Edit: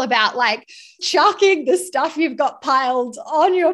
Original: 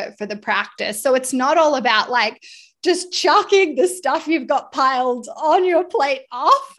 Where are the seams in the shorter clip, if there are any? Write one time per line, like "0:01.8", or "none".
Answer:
0:01.0